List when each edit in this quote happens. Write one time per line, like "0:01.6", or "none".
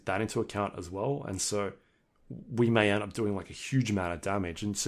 none